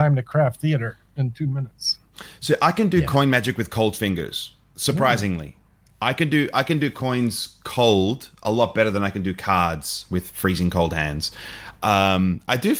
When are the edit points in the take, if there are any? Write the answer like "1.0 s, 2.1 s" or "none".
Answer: none